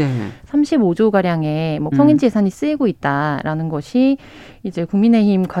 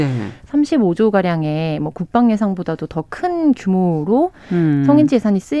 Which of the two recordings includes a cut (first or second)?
first